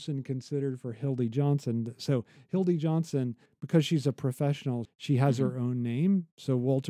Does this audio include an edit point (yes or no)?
yes